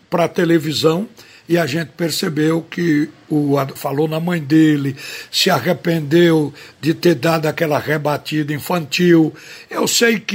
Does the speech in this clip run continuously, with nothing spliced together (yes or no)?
no